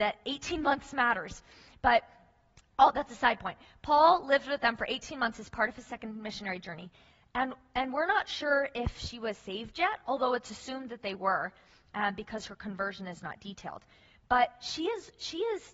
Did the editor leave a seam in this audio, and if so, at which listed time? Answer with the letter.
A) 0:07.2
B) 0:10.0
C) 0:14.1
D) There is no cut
D